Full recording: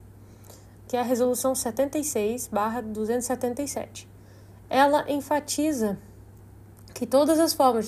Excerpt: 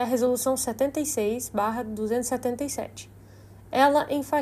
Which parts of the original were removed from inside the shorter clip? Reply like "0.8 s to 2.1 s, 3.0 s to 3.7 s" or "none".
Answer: none